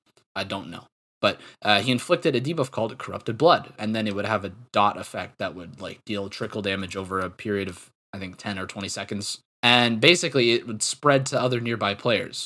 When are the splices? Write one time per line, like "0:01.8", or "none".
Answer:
0:03.8